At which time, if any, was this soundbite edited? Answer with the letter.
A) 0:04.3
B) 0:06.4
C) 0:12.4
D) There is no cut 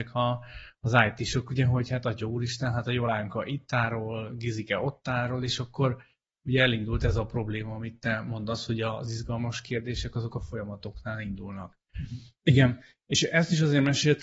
C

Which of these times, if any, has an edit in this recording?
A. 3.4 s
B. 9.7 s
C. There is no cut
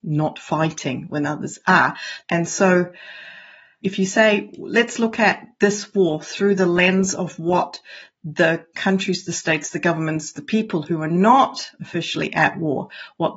C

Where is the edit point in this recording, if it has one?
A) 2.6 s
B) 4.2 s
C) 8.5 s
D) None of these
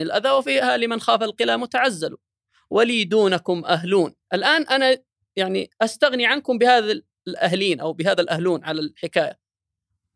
B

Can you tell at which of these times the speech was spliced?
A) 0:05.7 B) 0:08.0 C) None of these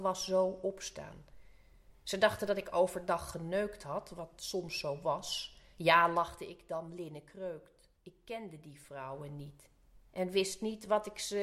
B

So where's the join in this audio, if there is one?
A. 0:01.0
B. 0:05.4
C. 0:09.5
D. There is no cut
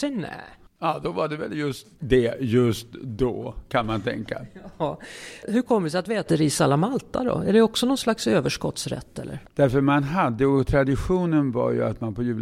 C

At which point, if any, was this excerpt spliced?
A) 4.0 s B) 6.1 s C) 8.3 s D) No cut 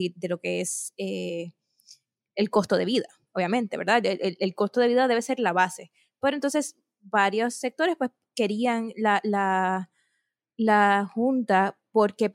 D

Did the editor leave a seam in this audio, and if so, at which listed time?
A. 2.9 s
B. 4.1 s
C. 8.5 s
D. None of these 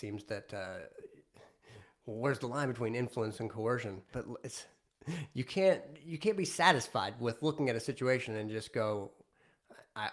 B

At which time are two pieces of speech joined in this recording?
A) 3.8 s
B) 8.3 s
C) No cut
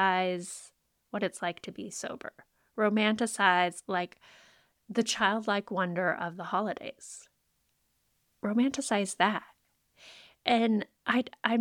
C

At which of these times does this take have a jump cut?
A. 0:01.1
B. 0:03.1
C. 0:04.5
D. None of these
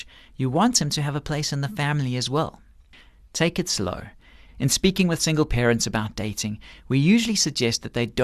C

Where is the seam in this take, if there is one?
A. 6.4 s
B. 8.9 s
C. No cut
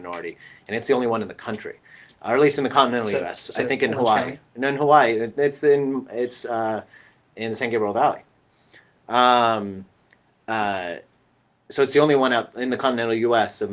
C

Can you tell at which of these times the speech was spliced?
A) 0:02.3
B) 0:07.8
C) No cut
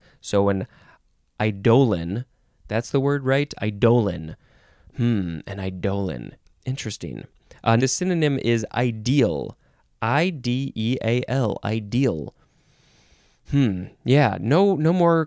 B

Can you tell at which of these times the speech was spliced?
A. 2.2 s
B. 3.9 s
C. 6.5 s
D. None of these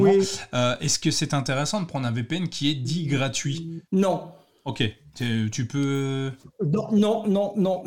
B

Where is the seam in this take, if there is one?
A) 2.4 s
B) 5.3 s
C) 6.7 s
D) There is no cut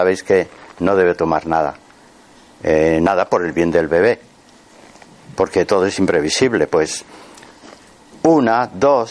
D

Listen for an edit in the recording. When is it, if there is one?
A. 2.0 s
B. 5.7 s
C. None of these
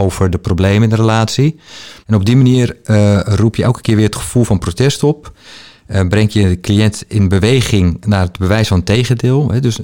A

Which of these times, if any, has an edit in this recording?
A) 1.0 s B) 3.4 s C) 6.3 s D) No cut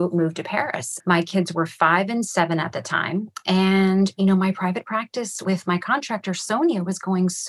A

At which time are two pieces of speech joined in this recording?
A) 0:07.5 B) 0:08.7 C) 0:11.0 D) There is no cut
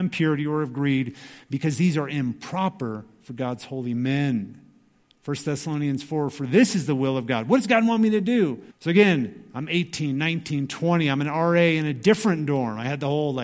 B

